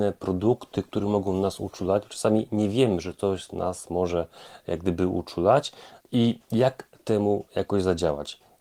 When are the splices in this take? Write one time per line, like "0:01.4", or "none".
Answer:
0:06.0